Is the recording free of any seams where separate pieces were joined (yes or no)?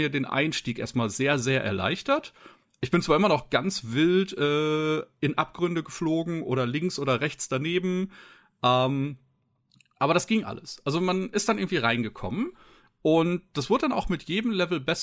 yes